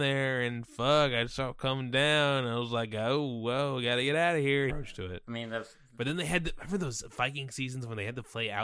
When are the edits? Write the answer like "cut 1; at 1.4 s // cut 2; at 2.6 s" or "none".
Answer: cut 1; at 4.7 s